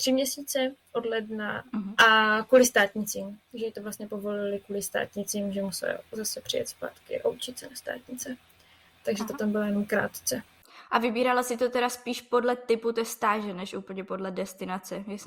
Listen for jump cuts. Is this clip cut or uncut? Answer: cut